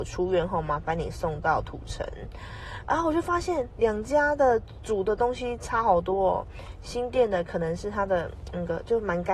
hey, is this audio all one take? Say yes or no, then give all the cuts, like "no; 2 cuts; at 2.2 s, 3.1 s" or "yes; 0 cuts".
yes; 0 cuts